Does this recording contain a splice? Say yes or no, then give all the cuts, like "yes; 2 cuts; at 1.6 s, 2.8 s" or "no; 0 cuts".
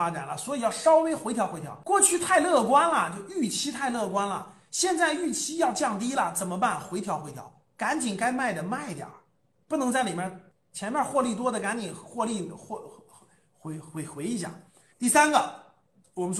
yes; 1 cut; at 14.9 s